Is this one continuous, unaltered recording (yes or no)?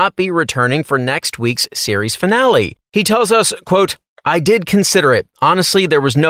yes